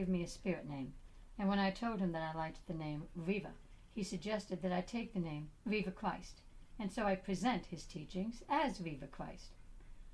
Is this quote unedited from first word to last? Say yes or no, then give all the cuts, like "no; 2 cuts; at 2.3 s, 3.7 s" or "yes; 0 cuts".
yes; 0 cuts